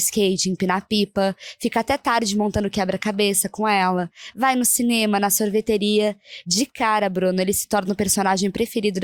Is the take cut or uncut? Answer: uncut